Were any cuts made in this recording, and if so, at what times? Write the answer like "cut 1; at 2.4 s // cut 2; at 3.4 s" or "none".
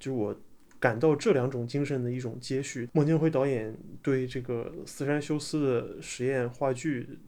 cut 1; at 2.9 s